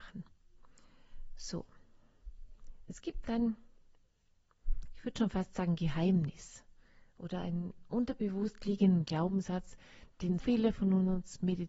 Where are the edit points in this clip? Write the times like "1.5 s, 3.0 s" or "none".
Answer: 10.4 s